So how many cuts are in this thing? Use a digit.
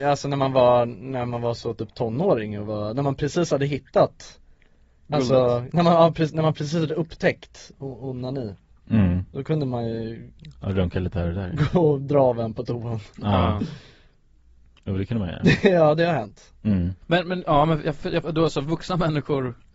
2